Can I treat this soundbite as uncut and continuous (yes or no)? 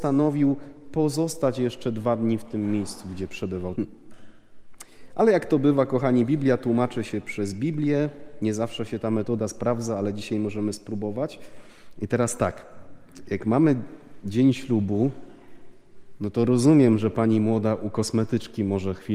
no